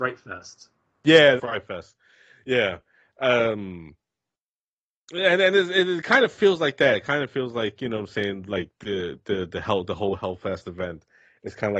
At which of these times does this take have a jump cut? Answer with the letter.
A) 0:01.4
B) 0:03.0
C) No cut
A